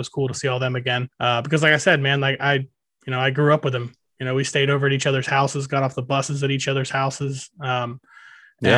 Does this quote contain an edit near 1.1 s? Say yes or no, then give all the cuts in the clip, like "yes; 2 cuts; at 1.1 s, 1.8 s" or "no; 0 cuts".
yes; 1 cut; at 1.1 s